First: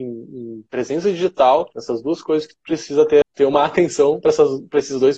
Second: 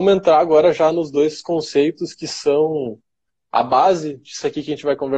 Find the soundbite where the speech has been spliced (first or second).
first